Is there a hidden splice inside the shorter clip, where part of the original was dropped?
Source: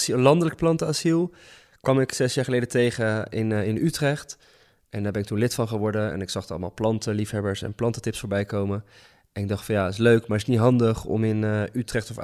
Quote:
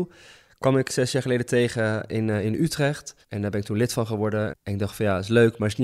yes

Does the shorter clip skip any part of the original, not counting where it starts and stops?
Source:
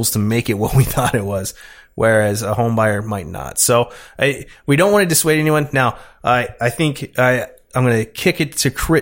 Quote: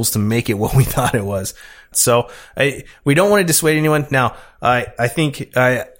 yes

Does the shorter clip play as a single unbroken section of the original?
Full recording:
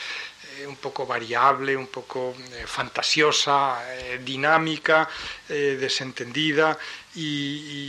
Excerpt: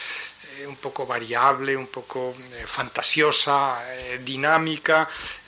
yes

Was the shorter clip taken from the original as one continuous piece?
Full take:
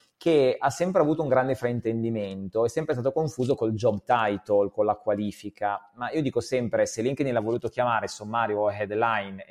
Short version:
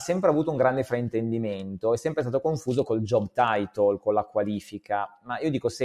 yes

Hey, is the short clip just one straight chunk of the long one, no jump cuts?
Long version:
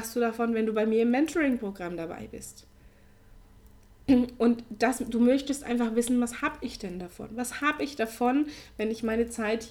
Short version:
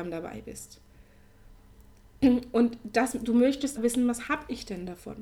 no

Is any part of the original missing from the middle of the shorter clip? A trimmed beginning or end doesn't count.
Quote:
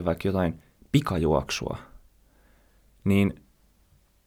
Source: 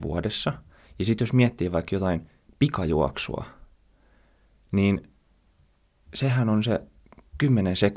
no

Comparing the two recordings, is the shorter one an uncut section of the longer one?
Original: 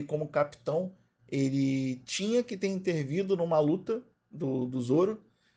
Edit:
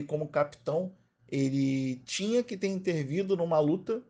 yes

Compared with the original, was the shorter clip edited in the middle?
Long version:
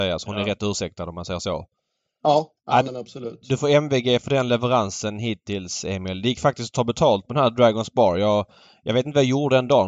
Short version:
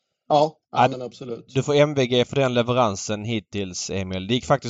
no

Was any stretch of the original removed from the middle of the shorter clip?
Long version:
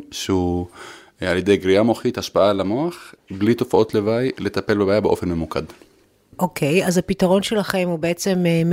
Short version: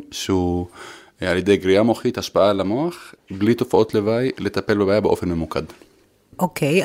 no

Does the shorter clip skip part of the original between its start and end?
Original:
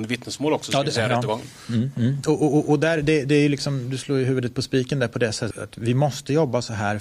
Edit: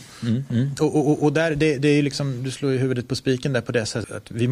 no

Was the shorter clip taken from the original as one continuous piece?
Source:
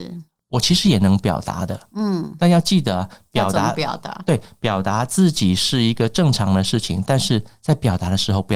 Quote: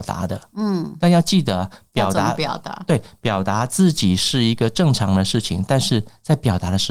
yes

